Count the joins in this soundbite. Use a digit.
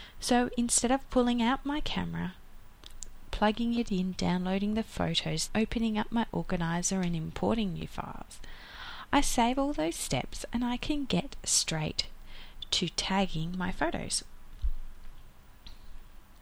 2